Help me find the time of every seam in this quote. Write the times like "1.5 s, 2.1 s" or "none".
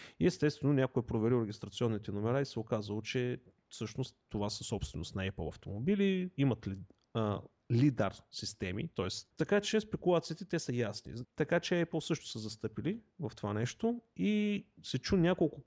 9.3 s, 11.2 s